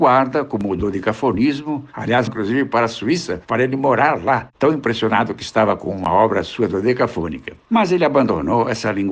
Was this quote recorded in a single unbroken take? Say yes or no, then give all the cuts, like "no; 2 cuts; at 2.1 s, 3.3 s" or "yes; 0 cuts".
no; 1 cut; at 2.3 s